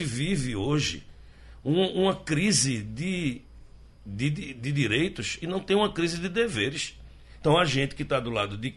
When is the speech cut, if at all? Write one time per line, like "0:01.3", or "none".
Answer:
0:07.4

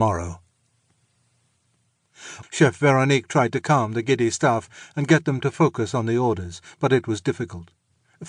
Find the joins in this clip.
0:02.4

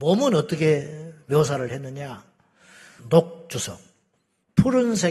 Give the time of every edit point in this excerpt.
0:03.0

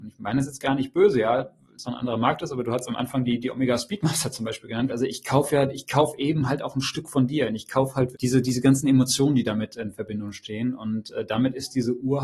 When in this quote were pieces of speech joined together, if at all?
0:01.8
0:04.9
0:08.1

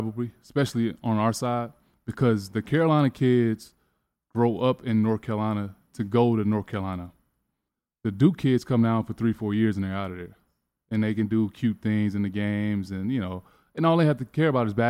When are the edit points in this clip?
none

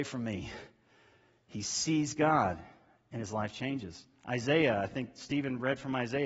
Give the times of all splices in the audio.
none

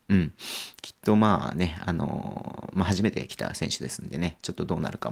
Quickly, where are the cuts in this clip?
none

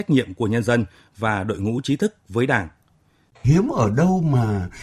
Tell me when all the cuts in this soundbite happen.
0:03.3

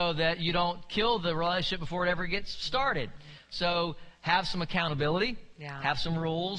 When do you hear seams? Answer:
none

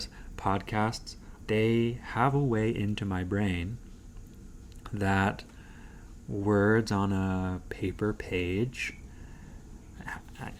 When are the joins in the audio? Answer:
0:01.5

